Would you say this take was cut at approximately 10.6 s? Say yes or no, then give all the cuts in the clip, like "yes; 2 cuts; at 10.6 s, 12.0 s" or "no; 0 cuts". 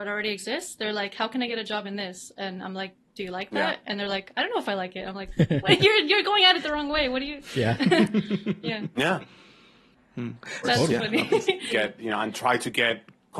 yes; 2 cuts; at 10.6 s, 11.7 s